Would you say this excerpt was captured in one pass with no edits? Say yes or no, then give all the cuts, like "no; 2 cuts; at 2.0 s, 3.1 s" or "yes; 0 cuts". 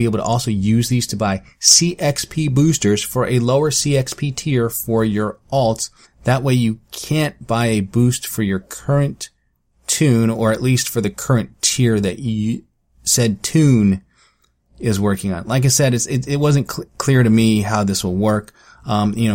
no; 1 cut; at 6.0 s